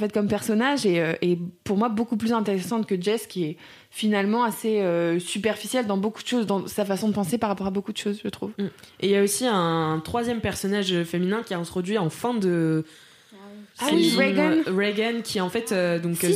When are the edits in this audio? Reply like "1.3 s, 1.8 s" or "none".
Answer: 13.7 s